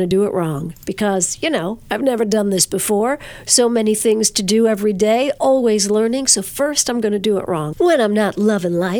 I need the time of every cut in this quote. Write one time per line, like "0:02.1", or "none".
0:05.4
0:07.7